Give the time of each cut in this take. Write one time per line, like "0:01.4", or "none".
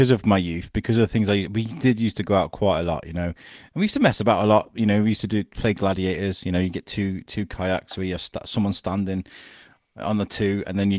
none